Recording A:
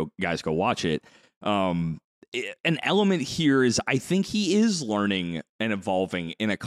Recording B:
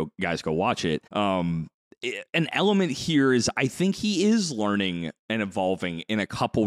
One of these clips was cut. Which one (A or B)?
B